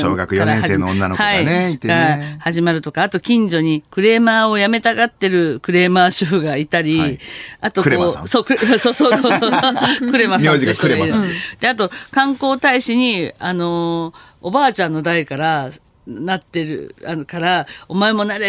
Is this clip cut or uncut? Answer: uncut